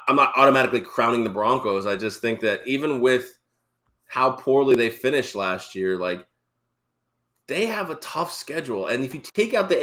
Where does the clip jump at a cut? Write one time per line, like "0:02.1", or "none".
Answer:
none

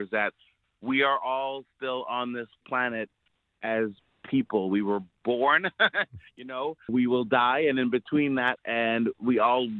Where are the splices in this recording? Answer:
0:06.9
0:08.6

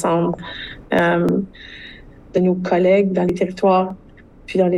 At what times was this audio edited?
0:02.3

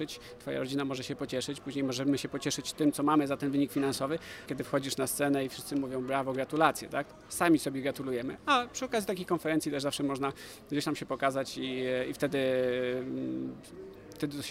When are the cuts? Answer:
0:04.5

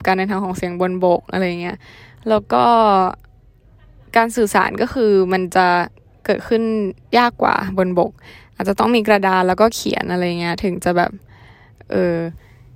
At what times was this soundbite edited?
none

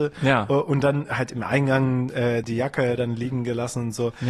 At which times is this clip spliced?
0:02.4

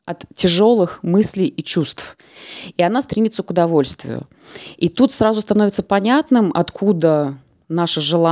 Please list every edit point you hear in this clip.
none

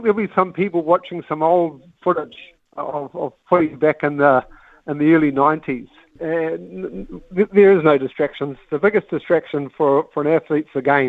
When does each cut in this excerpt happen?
0:06.2

